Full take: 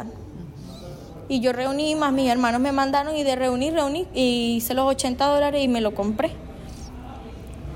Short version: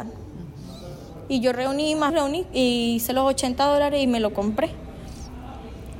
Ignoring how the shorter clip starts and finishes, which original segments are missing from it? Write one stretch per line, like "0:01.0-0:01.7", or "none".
0:02.1-0:03.7